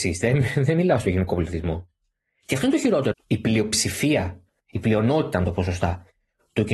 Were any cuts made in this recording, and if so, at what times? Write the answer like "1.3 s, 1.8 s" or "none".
3.1 s